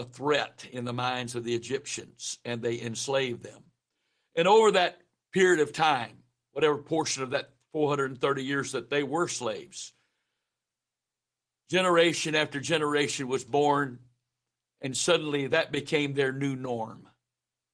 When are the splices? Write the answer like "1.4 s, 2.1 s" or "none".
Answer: none